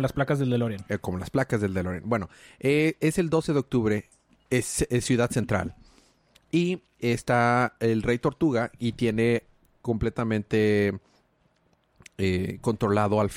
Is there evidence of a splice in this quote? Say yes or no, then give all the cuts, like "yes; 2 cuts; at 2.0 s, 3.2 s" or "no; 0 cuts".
no; 0 cuts